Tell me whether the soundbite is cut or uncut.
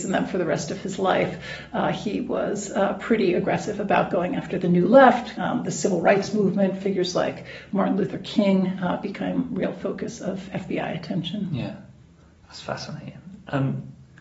cut